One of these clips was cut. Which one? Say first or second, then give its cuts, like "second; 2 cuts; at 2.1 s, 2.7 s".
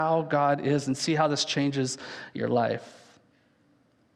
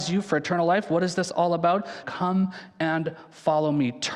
second; 1 cut; at 2.0 s